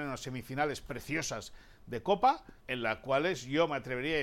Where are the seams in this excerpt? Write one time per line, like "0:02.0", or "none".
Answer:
0:02.6